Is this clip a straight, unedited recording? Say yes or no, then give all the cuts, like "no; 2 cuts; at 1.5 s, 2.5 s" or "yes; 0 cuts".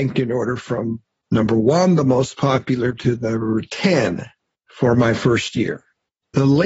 yes; 0 cuts